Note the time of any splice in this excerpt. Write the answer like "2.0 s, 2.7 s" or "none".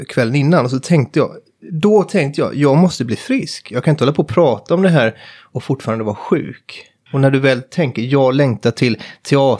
7.1 s